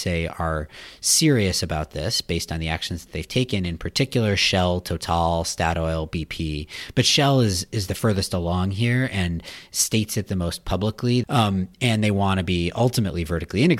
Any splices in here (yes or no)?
yes